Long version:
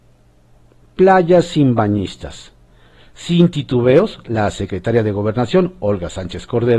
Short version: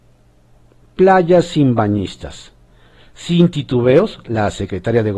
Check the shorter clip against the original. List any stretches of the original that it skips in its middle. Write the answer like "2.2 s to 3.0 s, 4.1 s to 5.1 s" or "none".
none